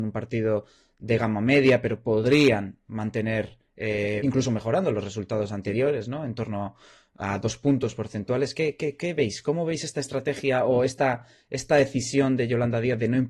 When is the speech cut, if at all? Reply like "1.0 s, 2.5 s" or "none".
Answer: 4.2 s